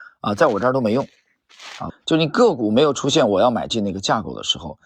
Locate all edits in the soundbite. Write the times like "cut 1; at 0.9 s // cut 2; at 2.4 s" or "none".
cut 1; at 1.9 s